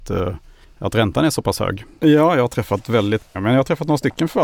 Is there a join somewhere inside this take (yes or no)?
yes